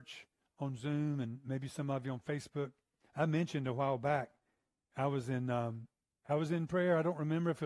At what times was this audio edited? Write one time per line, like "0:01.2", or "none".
0:03.0